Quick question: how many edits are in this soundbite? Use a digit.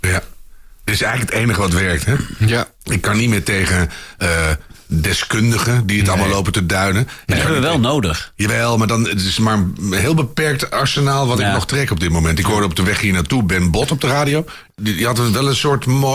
1